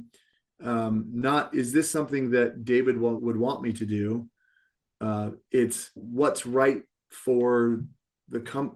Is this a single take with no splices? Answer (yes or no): no